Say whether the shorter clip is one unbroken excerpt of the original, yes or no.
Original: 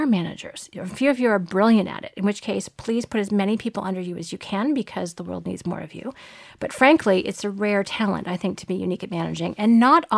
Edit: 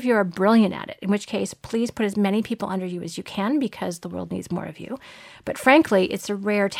yes